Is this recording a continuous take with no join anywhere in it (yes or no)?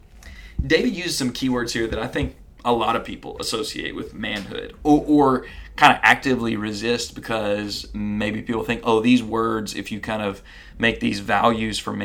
yes